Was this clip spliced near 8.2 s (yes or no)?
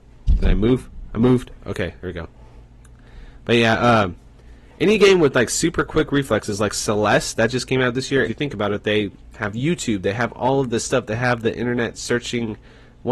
yes